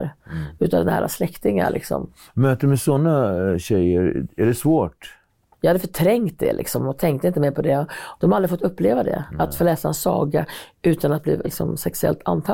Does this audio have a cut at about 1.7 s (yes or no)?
no